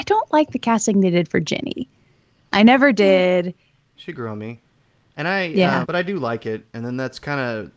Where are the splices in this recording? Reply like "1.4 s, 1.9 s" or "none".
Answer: 3.9 s, 5.8 s